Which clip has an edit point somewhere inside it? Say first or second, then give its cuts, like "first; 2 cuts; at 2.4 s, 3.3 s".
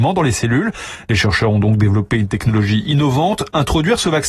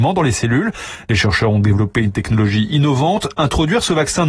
second; 1 cut; at 1.6 s